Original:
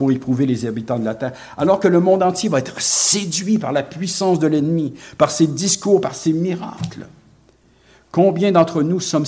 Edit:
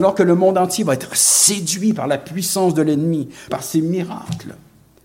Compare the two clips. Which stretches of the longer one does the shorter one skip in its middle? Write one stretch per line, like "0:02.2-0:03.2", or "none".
0:05.1-0:06.0